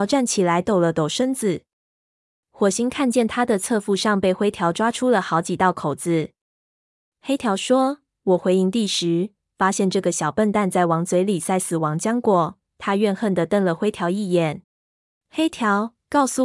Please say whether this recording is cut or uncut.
cut